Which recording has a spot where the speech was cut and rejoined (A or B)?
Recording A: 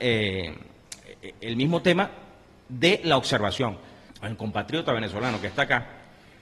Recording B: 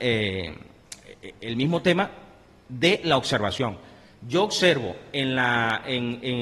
A